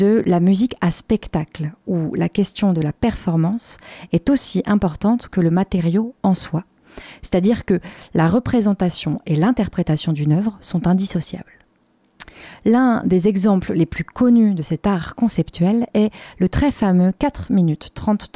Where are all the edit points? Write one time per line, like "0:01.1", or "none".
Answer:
none